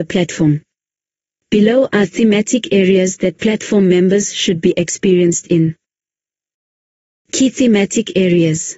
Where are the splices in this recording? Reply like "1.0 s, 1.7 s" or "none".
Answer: none